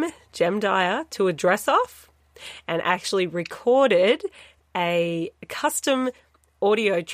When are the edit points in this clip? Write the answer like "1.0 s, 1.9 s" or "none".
none